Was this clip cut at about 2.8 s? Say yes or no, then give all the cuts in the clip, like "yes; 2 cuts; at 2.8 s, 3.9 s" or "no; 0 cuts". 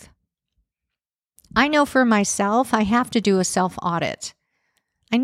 no; 1 cut; at 1.4 s